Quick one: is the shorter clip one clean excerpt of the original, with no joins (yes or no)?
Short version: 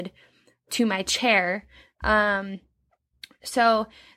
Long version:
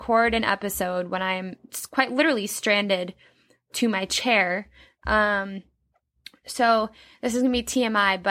yes